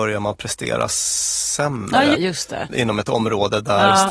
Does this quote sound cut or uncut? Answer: cut